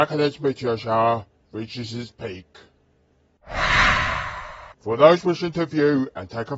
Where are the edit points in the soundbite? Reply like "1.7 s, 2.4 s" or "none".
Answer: 4.7 s